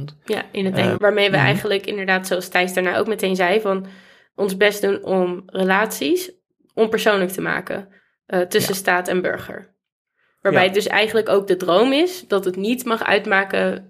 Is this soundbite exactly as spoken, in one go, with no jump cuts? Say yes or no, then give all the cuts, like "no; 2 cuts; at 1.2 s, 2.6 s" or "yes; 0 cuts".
no; 1 cut; at 0.9 s